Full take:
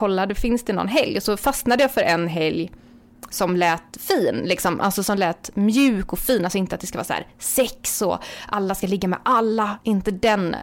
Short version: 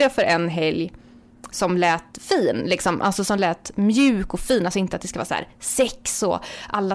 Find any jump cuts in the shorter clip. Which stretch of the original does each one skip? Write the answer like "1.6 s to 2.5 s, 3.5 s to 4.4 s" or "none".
none